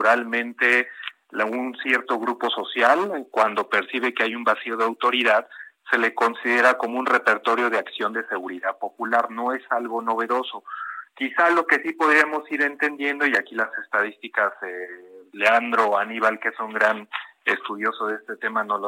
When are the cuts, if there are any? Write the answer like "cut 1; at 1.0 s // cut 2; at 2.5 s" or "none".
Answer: none